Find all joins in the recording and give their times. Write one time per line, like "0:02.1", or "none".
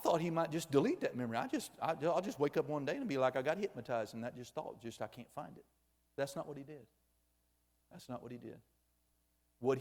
none